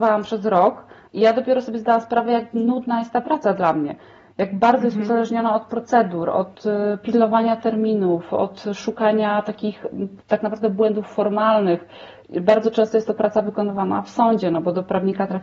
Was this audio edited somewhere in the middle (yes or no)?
no